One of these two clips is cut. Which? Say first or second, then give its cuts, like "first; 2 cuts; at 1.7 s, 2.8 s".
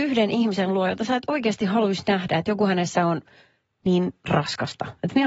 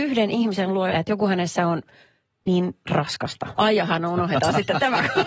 second; 2 cuts; at 0.9 s, 3.6 s